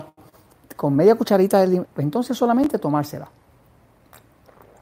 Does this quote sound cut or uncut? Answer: cut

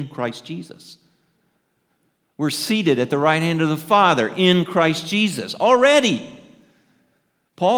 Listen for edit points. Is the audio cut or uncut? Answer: uncut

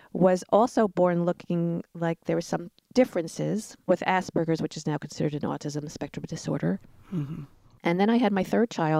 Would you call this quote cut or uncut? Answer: cut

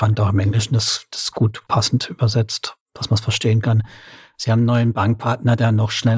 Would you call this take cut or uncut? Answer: cut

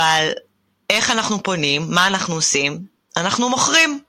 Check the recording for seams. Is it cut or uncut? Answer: uncut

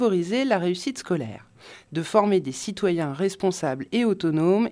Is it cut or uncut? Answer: uncut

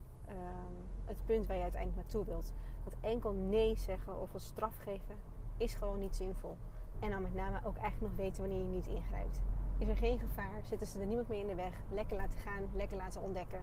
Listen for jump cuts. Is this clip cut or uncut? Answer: cut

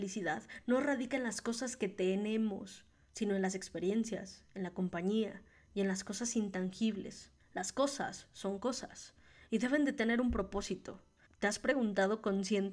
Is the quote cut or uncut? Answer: cut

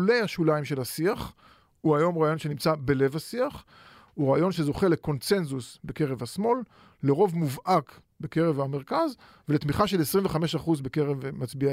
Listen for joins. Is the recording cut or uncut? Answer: uncut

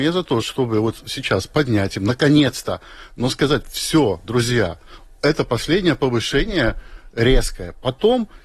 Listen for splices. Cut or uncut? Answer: uncut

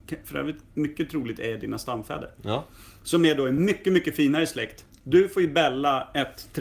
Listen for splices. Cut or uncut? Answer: uncut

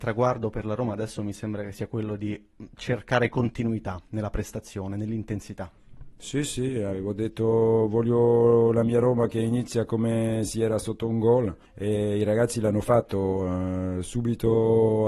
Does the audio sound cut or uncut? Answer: cut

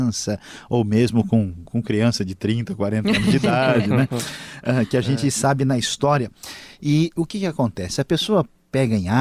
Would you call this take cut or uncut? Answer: uncut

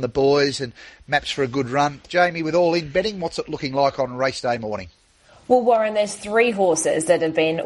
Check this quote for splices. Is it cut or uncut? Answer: cut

